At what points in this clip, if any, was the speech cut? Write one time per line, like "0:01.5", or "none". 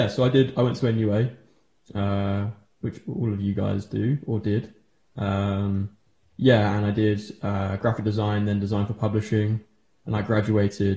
none